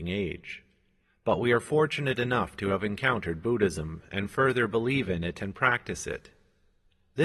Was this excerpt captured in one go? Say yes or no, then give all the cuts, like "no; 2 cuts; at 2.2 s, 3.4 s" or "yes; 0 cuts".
yes; 0 cuts